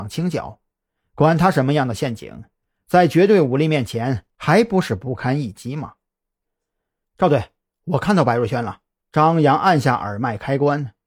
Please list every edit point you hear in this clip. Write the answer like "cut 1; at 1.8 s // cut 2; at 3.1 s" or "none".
cut 1; at 7.0 s // cut 2; at 9.0 s